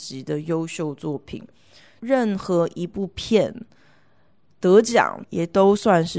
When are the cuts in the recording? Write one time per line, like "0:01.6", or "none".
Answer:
0:05.2